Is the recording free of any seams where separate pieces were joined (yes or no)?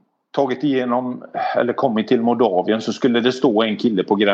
yes